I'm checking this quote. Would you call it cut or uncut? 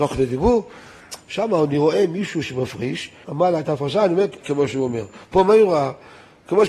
cut